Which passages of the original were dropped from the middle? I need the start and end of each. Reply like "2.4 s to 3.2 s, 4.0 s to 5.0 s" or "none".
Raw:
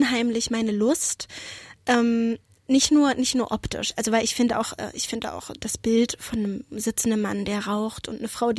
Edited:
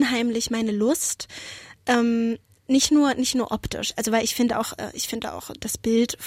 none

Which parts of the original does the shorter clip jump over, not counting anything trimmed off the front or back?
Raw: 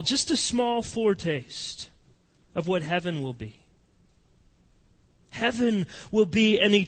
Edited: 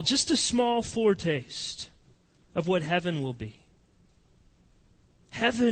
none

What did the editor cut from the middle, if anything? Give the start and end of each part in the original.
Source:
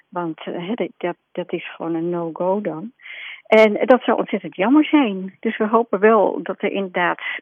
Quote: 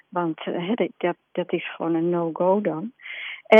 none

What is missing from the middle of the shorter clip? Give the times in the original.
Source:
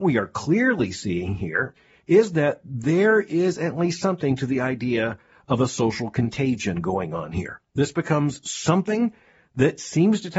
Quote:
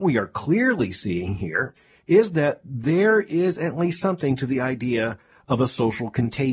none

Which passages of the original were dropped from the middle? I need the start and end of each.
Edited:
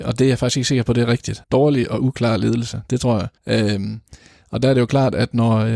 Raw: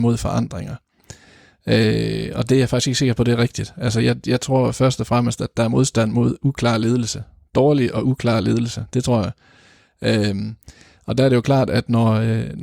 3.7 s to 7.5 s, 9.4 s to 9.9 s

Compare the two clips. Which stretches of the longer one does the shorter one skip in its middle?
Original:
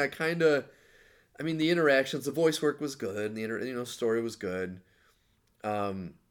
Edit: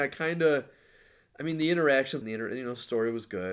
2.2 s to 3.3 s

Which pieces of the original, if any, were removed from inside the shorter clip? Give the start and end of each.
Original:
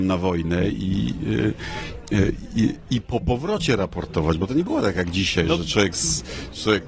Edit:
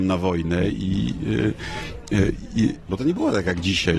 2.9 s to 4.4 s

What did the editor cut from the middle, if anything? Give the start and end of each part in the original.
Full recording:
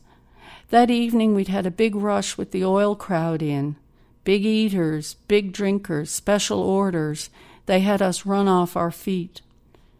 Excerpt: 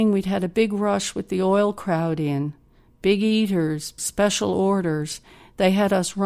5.2 s to 6.1 s

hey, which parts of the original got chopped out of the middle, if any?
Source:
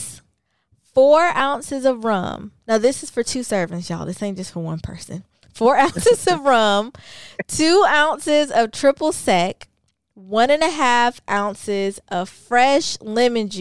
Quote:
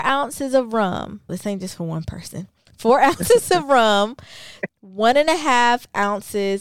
2.6 s to 4.1 s, 7.4 s to 10.0 s

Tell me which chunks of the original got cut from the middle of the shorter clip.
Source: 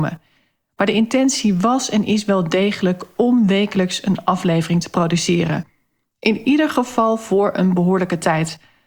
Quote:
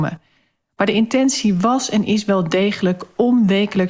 none

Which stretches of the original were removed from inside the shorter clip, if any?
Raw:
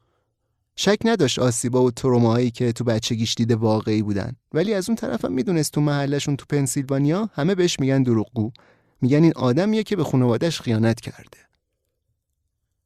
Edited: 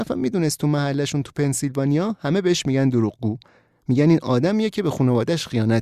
none

